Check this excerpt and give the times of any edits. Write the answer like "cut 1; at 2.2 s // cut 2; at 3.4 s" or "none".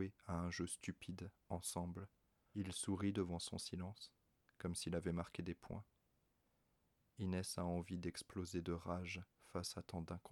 cut 1; at 2.5 s